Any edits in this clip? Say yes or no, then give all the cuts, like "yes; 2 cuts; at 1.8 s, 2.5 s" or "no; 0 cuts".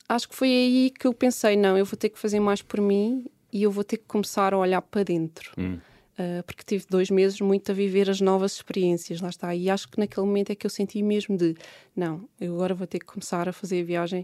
no; 0 cuts